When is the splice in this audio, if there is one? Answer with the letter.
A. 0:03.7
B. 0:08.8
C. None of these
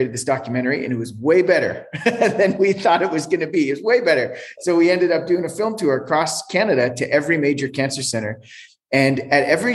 C